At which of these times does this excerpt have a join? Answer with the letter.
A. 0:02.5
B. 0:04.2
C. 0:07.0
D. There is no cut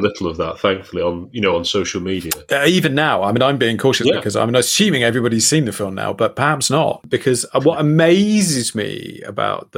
C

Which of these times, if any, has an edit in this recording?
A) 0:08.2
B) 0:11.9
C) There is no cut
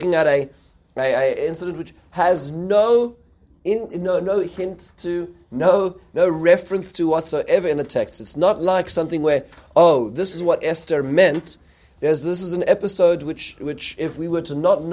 C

